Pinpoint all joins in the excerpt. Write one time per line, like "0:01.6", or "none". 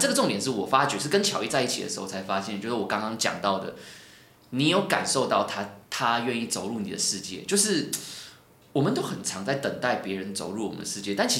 0:05.8